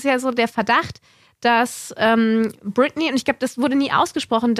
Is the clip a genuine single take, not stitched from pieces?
yes; 0 cuts

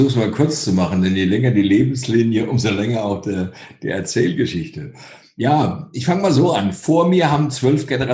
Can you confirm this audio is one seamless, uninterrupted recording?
yes; 0 cuts

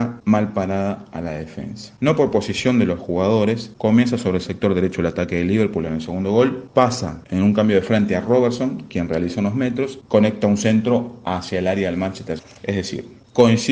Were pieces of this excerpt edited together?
yes; 1 cut; at 12.6 s

